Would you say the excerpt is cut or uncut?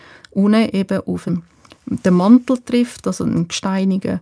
uncut